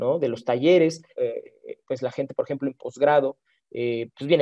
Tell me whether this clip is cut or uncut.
cut